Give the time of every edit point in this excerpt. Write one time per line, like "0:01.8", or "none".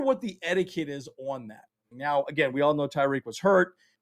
0:01.9